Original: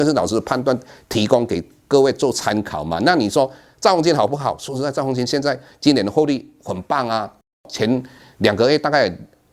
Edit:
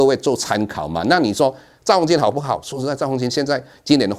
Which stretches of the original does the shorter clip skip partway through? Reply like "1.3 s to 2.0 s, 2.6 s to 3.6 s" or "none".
none